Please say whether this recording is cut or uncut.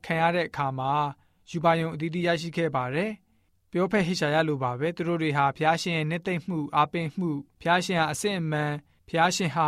cut